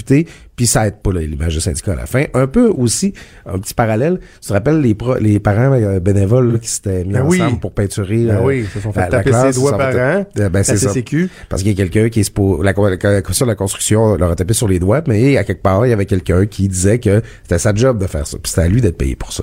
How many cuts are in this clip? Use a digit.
0